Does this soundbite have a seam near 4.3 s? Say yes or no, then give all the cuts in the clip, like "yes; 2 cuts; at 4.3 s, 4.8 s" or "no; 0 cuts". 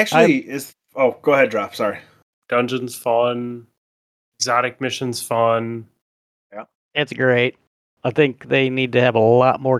no; 2 cuts; at 2.3 s, 6.8 s